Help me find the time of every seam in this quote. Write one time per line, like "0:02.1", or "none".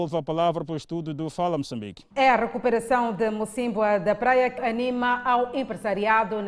0:02.1
0:04.6